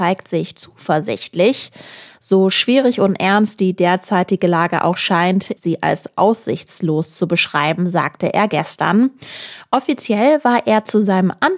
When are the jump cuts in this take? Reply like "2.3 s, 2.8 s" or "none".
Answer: 5.6 s